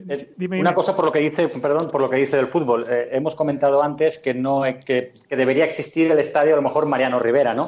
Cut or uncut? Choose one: uncut